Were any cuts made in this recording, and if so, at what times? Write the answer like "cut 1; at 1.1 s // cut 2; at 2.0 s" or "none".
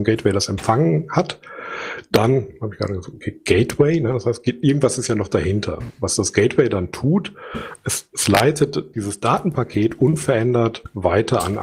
none